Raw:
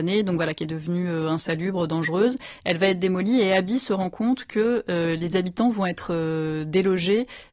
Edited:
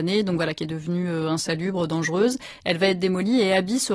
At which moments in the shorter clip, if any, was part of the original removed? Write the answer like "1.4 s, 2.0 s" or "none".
none